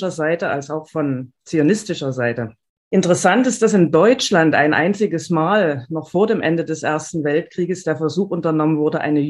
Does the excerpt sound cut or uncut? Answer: cut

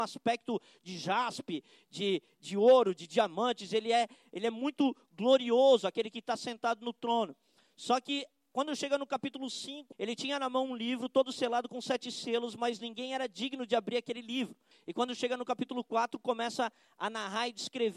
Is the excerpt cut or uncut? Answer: cut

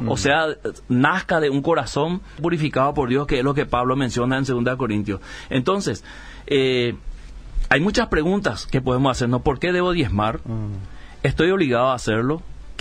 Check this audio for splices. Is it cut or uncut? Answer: cut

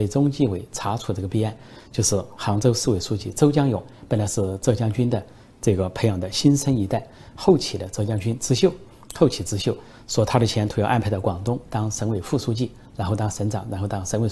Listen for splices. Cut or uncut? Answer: uncut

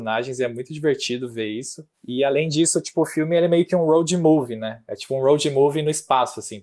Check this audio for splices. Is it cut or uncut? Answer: uncut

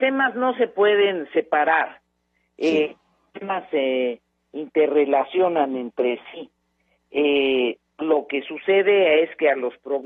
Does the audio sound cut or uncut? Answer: uncut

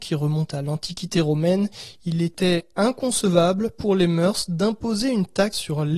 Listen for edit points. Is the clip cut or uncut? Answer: uncut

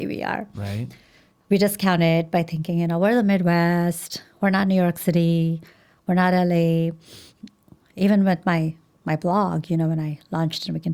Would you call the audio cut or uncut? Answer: uncut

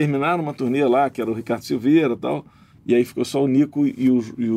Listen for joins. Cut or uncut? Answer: cut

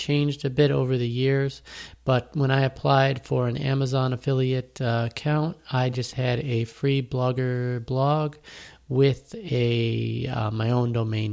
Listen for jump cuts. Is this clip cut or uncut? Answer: uncut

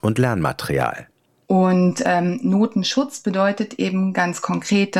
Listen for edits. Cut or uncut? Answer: cut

